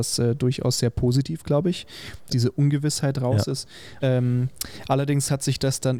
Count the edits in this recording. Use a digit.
2